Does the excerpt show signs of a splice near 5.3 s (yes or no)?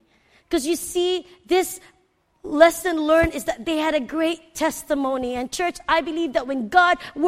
no